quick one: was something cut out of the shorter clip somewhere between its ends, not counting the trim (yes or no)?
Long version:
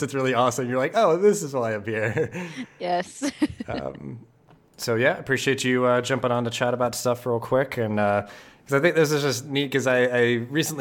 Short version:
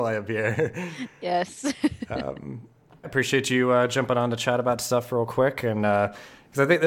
yes